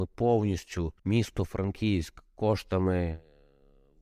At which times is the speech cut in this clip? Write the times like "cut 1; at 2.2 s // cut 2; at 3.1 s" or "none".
cut 1; at 1.0 s